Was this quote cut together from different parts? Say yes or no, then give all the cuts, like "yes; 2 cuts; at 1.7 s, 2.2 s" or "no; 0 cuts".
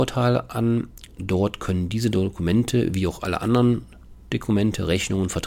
no; 0 cuts